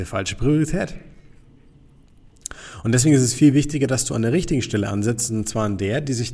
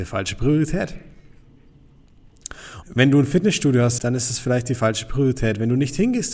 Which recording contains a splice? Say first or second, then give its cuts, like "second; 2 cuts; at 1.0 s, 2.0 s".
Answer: second; 2 cuts; at 2.8 s, 4.0 s